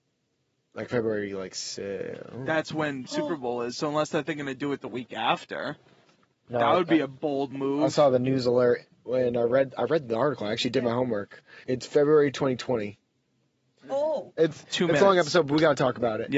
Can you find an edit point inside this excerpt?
yes; 2 cuts; at 11.6 s, 14.4 s

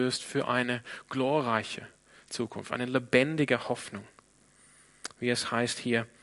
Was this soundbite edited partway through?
no; 0 cuts

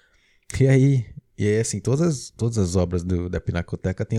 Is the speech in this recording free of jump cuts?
yes; 0 cuts

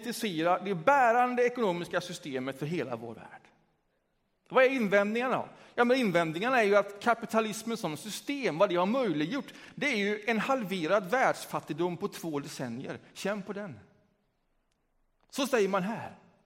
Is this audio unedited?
yes; 0 cuts

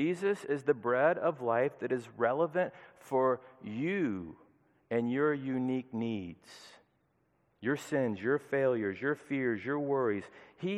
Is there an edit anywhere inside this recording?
no; 0 cuts

